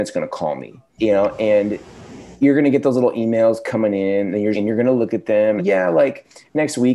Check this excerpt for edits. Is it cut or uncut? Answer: cut